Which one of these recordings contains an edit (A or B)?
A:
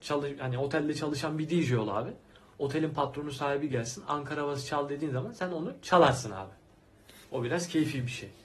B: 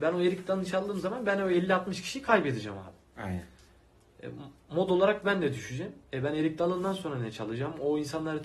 A